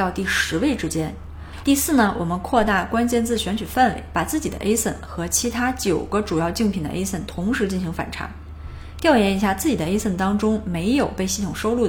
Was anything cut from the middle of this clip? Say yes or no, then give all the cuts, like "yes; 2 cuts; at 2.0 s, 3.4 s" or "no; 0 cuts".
yes; 1 cut; at 1.6 s